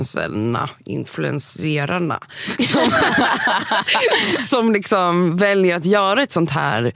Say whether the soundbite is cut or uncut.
cut